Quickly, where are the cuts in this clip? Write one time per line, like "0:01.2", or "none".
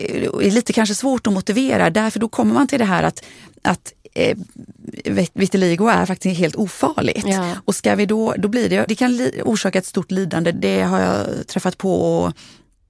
0:08.9
0:10.5